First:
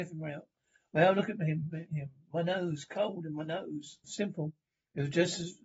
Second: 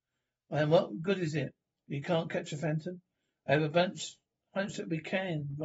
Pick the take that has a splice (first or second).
first